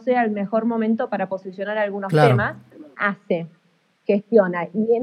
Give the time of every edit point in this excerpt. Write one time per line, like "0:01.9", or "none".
0:02.9